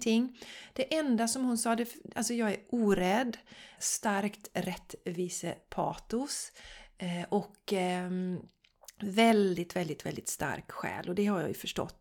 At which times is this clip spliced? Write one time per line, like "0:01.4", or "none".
0:03.8